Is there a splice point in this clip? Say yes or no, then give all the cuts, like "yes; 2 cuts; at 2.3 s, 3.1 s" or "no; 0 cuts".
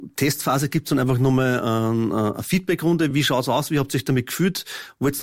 no; 0 cuts